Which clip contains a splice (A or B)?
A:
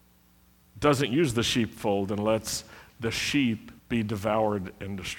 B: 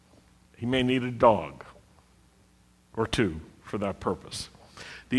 A